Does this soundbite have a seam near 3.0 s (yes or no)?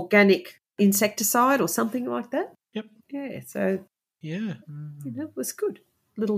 yes